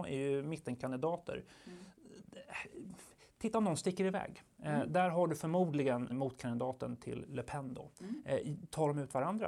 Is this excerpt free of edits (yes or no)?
no